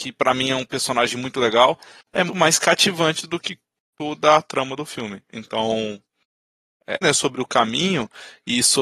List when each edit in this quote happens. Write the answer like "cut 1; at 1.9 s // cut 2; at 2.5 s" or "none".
cut 1; at 2.3 s // cut 2; at 7.0 s